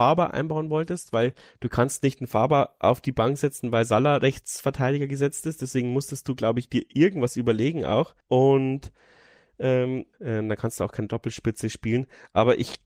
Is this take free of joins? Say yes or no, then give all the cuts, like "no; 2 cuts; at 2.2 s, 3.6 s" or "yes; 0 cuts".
no; 2 cuts; at 8.2 s, 10.1 s